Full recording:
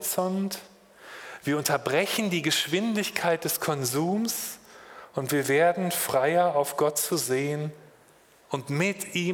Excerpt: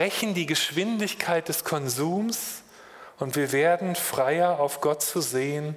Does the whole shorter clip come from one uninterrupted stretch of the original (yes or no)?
yes